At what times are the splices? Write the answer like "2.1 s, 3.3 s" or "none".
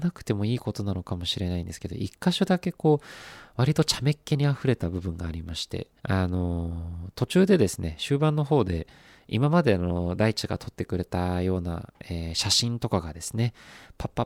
6.0 s